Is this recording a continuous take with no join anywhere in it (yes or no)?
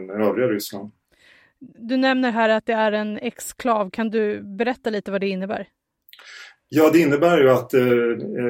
yes